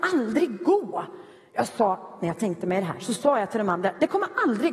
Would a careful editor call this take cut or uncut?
uncut